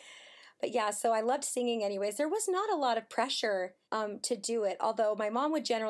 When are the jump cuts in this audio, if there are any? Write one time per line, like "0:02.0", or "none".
0:03.8